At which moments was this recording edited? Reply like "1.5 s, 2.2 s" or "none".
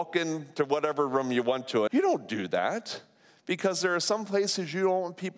1.9 s